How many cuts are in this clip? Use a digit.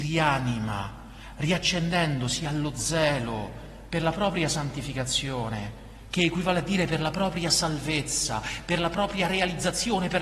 0